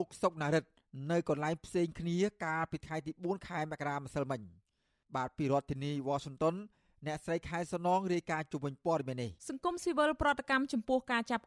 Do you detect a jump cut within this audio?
yes; 1 cut; at 9.4 s

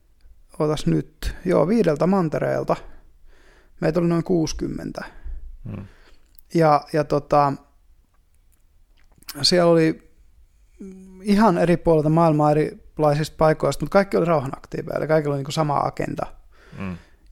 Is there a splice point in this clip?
no; 0 cuts

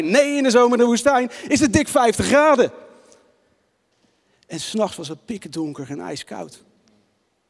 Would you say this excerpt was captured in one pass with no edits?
yes; 0 cuts

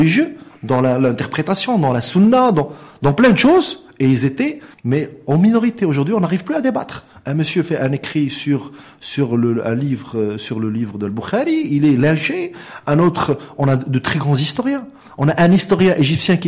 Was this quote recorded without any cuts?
no; 1 cut; at 4.7 s

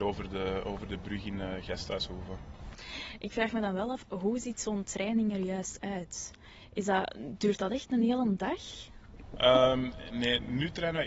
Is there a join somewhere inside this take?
no; 0 cuts

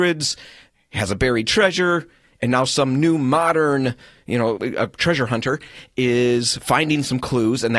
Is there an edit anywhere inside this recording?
yes; 1 cut; at 4.6 s

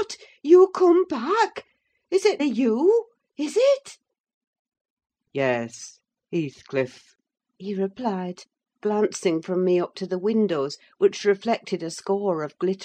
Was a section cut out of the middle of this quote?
yes; 1 cut; at 2.4 s

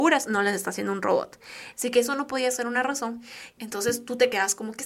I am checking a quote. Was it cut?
yes; 2 cuts; at 1.7 s, 3.6 s

